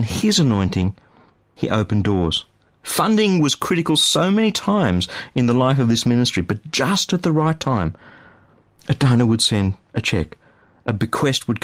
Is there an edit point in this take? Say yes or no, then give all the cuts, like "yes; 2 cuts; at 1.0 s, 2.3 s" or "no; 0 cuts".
no; 0 cuts